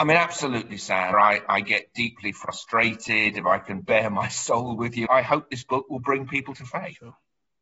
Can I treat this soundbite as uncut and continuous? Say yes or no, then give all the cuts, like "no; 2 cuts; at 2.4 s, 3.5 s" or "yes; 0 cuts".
no; 2 cuts; at 1.1 s, 5.1 s